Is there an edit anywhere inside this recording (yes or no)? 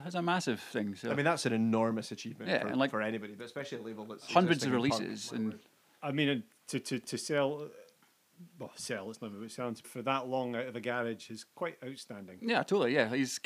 yes